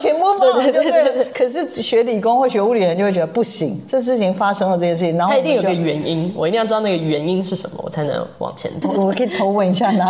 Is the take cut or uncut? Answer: cut